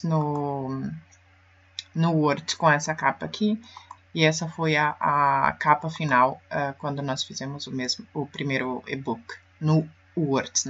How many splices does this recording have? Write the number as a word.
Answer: one